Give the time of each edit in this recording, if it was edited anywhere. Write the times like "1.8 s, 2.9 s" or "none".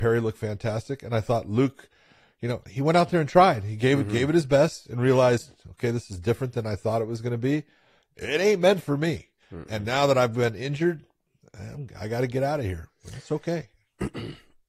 none